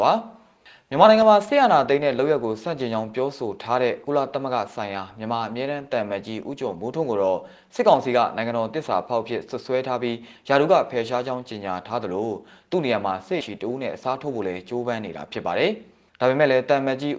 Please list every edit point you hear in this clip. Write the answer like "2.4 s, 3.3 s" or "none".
13.4 s